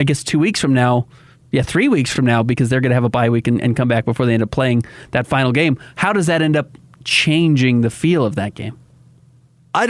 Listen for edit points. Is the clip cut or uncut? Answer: uncut